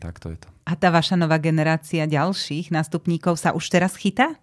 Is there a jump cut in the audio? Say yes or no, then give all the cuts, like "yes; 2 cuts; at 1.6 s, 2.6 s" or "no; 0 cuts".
no; 0 cuts